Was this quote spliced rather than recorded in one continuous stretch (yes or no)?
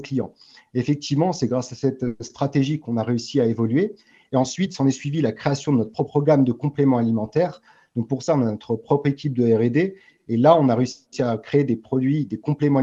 no